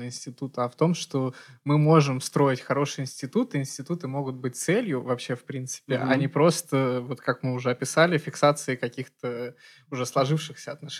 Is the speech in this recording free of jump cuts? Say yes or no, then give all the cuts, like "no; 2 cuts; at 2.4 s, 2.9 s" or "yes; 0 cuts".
yes; 0 cuts